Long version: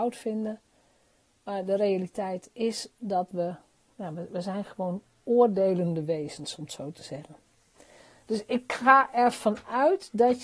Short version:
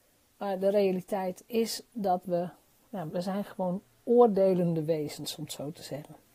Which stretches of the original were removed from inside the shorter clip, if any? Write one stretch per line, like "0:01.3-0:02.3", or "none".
0:04.1-0:04.3